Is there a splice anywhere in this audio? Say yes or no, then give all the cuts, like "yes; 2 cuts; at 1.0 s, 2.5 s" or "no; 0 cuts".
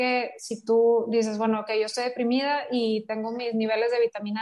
no; 0 cuts